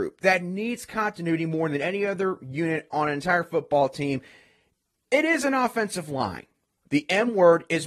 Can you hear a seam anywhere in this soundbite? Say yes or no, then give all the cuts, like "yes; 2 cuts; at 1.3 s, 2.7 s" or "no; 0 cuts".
yes; 1 cut; at 6.8 s